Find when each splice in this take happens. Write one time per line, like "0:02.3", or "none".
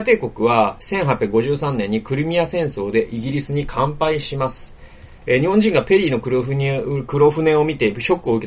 0:05.2